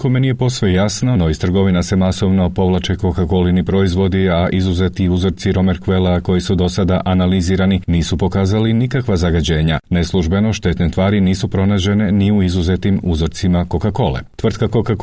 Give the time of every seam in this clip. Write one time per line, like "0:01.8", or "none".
none

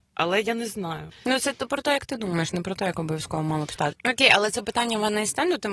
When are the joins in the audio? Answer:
0:01.1
0:03.9

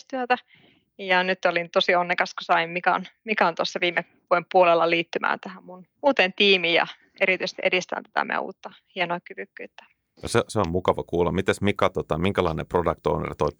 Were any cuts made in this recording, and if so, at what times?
0:06.0

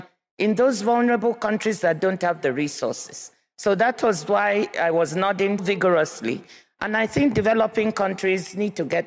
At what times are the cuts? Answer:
0:05.6

